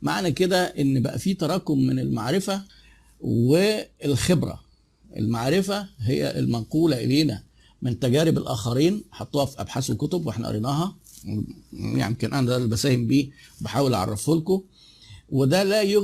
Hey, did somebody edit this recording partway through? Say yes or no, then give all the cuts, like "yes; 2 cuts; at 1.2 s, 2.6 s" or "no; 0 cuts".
no; 0 cuts